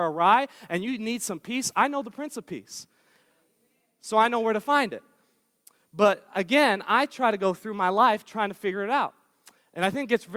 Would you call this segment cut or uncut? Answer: uncut